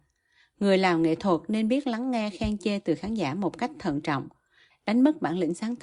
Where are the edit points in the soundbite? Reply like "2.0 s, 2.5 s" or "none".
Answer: 4.7 s